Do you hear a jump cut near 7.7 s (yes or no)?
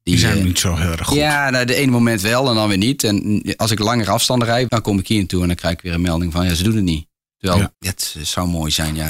yes